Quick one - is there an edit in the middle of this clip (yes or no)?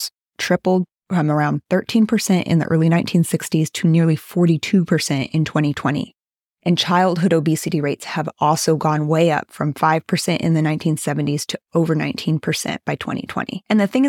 no